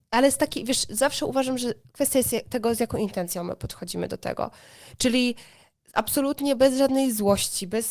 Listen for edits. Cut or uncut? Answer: uncut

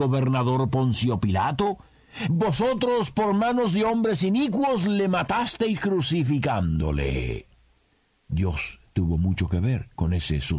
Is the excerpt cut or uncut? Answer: cut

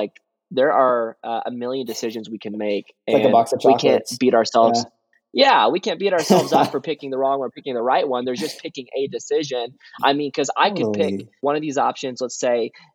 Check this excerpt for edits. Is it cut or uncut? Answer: uncut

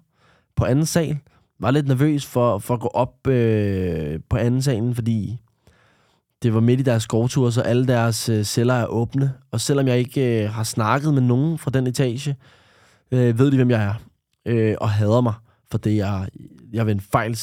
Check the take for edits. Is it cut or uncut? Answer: uncut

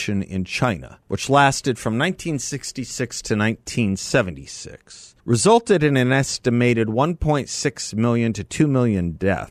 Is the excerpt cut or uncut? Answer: cut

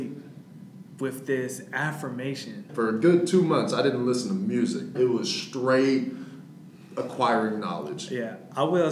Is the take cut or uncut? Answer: cut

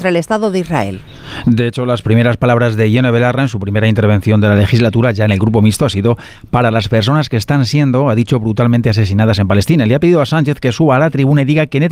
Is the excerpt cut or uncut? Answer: uncut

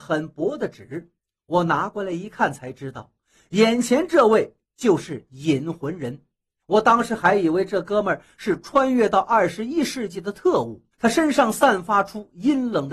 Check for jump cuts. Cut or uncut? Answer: cut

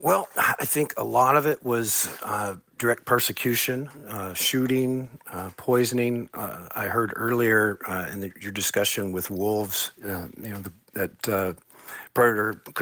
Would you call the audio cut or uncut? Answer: uncut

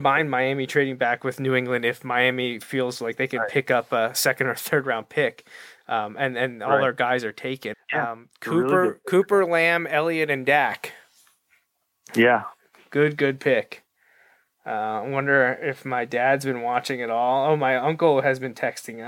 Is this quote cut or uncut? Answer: cut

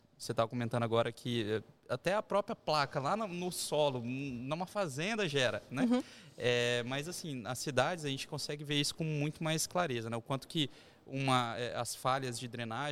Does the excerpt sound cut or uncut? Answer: uncut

